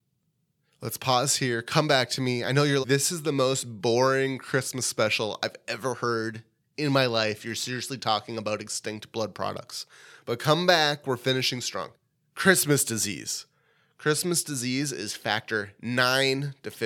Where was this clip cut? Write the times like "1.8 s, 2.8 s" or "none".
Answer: 2.8 s